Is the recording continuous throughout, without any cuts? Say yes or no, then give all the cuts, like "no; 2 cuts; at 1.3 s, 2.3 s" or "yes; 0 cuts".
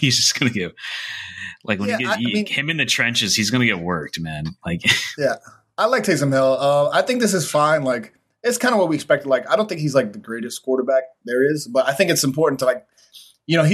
yes; 0 cuts